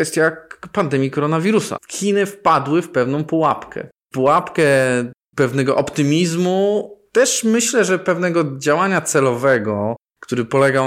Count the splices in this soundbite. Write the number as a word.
one